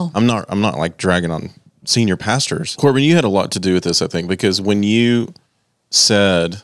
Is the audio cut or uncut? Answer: cut